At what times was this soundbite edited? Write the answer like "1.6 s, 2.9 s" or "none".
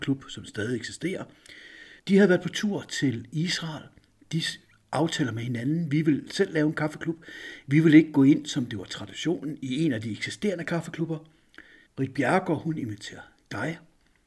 2.0 s, 11.9 s